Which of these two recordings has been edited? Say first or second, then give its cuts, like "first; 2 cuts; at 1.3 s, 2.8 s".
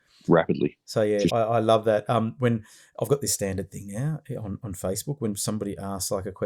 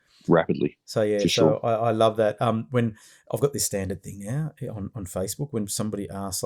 first; 1 cut; at 1.3 s